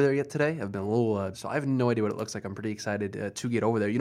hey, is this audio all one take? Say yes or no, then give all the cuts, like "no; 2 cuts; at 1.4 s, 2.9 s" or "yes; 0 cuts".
no; 1 cut; at 1.3 s